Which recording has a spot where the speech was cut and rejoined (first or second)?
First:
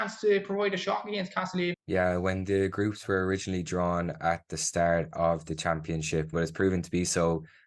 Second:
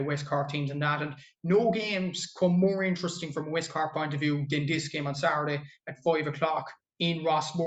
first